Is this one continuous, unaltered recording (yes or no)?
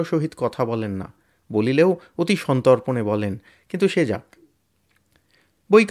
yes